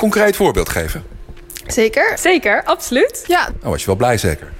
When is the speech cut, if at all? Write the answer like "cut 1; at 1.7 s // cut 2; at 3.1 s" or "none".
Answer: cut 1; at 2.1 s